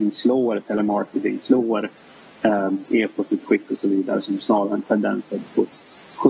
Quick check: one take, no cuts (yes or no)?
yes